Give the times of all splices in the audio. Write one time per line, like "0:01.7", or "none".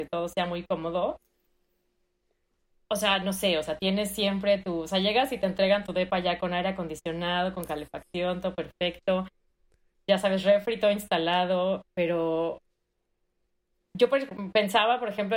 0:13.8